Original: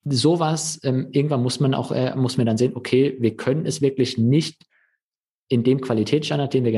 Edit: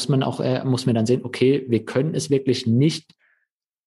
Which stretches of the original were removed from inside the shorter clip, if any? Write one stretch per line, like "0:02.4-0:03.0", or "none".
none

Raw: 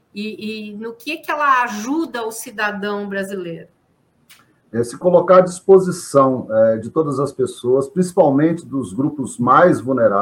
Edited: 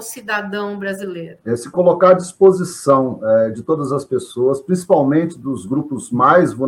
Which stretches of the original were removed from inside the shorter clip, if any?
0:03.7-0:04.7

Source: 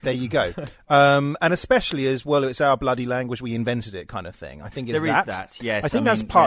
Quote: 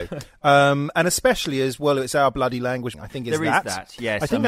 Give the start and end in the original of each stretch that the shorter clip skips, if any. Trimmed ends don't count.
0:03.4-0:04.6

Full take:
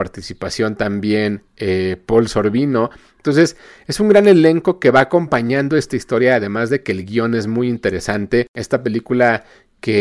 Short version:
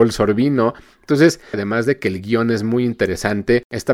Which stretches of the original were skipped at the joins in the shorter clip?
0:03.7-0:06.4

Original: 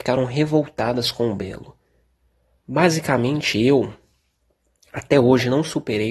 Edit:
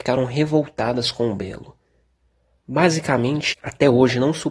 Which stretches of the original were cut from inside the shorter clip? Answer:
0:03.5-0:04.8

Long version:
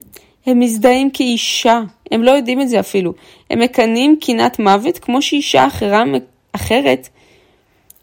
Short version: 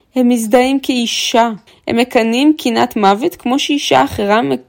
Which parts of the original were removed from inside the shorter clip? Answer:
0:02.0-0:03.3

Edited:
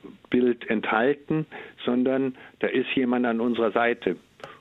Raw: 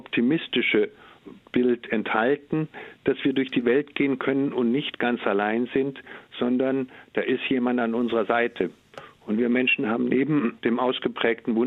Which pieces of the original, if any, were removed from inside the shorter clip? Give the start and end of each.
0:03.0-0:06.3

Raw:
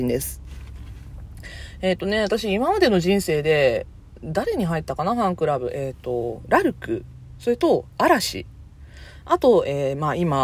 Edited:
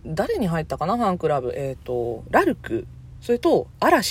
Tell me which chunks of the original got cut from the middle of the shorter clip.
none

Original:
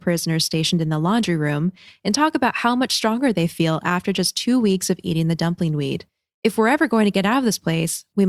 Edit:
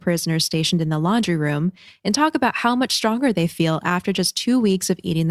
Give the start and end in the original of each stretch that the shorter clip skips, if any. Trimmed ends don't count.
none

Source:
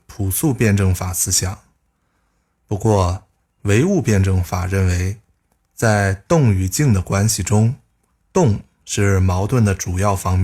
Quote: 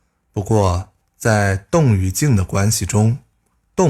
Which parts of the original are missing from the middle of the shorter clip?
0:03.4-0:05.6

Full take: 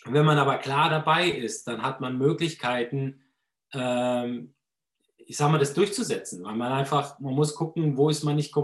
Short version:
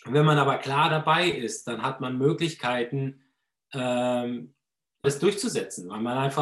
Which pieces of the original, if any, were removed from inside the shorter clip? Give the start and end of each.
0:05.0-0:05.6

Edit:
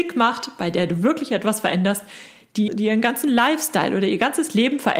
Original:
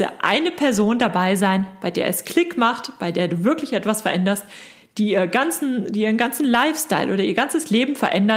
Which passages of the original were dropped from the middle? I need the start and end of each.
0:05.1-0:05.8

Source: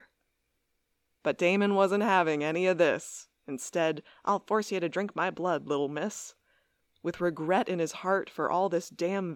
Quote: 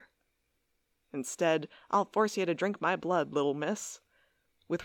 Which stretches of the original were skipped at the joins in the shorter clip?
0:01.0-0:03.4

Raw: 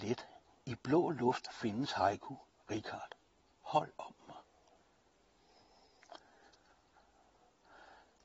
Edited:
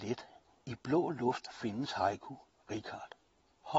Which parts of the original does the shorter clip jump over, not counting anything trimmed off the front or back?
none

